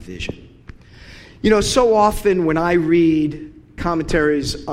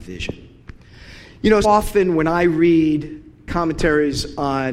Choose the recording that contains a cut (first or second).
second